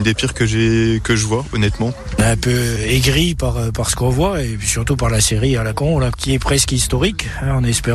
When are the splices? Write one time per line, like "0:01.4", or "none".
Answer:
0:06.1